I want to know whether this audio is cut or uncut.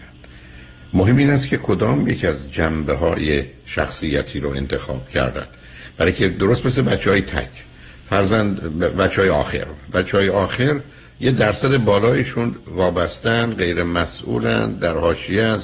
uncut